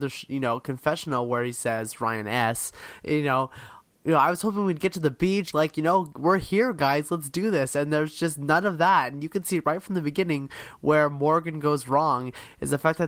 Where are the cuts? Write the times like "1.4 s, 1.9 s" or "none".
5.5 s